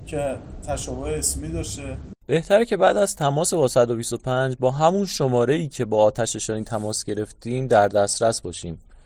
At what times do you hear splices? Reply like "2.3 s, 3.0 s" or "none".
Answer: 2.2 s